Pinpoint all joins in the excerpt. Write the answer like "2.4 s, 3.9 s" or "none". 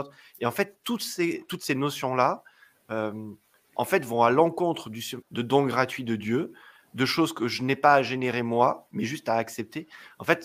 5.2 s